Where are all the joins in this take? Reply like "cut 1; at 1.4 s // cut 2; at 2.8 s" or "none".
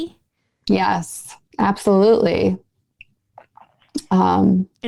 cut 1; at 1.5 s